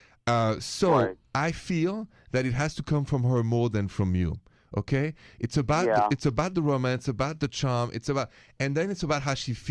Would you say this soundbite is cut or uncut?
uncut